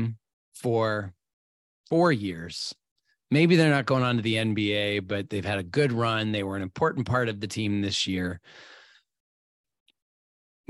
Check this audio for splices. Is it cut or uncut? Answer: uncut